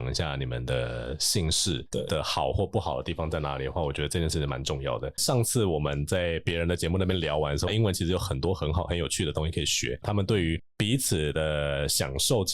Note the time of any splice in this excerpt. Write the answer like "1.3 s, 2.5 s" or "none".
7.7 s, 10.0 s

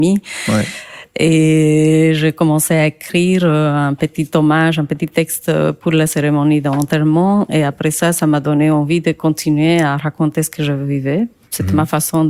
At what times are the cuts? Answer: none

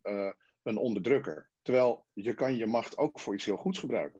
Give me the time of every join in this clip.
1.6 s

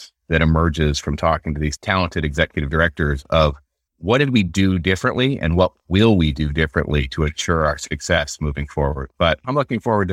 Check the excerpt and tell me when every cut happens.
none

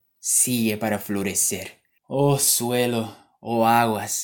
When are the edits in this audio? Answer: 2.0 s

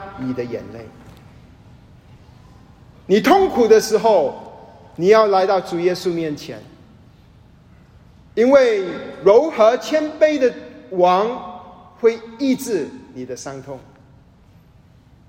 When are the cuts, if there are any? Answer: none

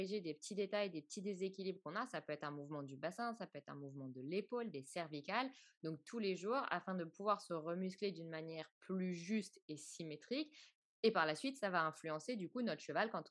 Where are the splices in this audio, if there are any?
none

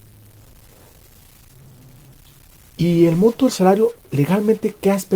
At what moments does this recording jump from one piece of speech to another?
none

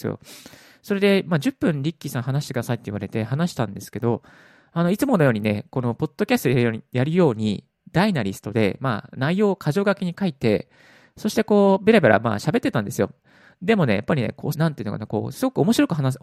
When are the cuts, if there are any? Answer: 14.5 s

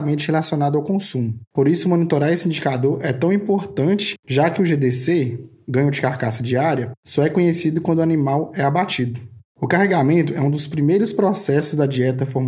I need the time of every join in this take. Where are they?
none

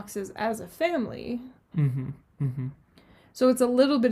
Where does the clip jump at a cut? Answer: 1.7 s

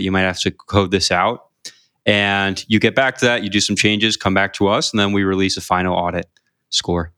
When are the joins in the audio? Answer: none

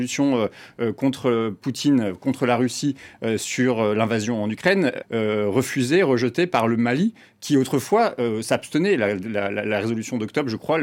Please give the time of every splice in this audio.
5.0 s

